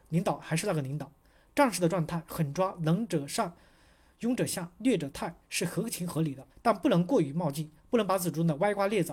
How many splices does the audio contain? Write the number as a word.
one